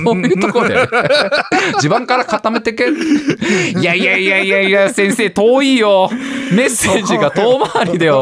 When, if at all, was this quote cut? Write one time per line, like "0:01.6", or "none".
none